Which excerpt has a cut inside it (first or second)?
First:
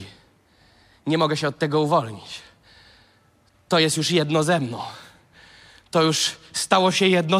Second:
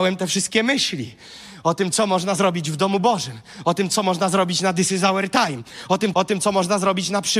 second